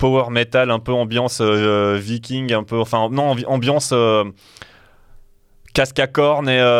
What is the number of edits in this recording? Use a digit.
0